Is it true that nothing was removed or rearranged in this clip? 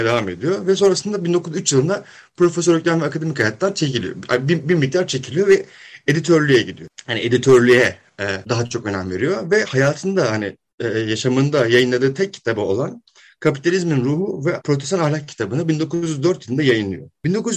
yes; 0 cuts

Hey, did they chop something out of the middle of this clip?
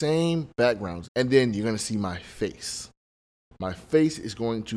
yes; 1 cut; at 1.0 s

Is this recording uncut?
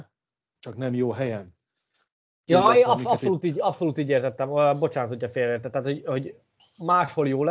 yes; 0 cuts

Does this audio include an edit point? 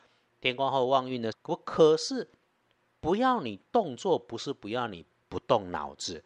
yes; 1 cut; at 1.3 s

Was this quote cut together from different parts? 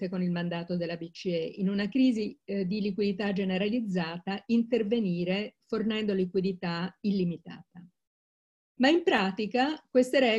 no; 0 cuts

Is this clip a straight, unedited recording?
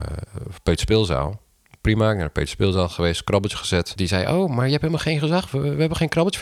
no; 1 cut; at 4.0 s

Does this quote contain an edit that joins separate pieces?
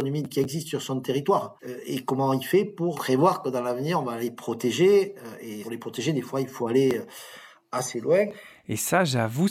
no; 0 cuts

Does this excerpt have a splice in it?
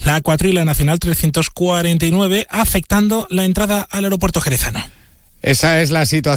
no; 0 cuts

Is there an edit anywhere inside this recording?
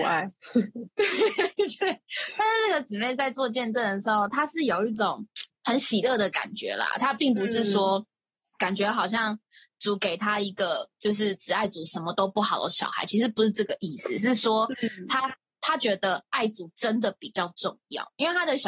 yes; 1 cut; at 5.5 s

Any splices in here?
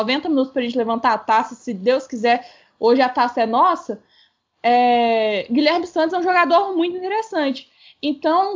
no; 0 cuts

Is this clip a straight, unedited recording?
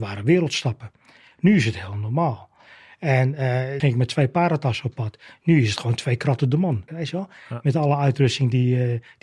no; 2 cuts; at 3.8 s, 6.9 s

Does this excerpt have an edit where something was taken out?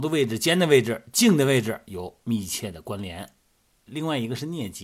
yes; 1 cut; at 3.9 s

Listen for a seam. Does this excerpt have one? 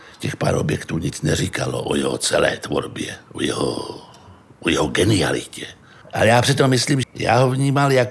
yes; 2 cuts; at 6.0 s, 7.0 s

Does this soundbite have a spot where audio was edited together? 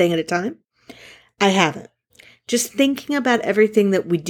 no; 0 cuts

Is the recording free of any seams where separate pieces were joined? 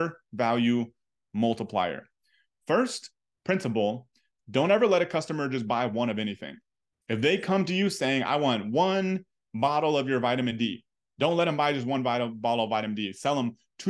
yes; 0 cuts

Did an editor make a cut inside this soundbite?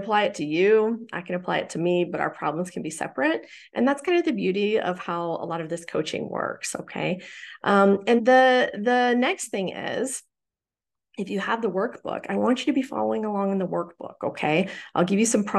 yes; 1 cut; at 8.2 s

